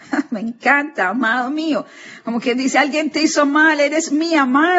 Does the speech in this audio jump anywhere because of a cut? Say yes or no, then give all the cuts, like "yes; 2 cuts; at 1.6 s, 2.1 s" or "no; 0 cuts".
no; 0 cuts